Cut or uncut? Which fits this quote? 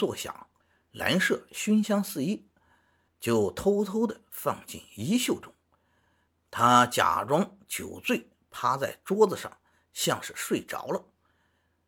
cut